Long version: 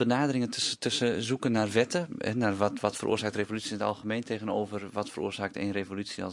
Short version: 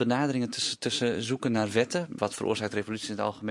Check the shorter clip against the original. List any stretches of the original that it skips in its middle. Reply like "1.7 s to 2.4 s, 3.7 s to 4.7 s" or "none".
2.2 s to 2.8 s

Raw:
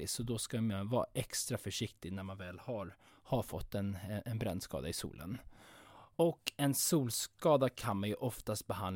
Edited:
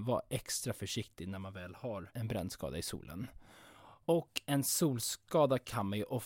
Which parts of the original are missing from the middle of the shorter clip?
3.0 s to 4.2 s

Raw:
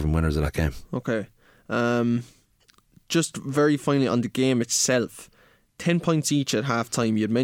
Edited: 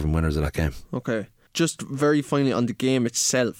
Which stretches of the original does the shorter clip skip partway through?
1.5 s to 3.0 s

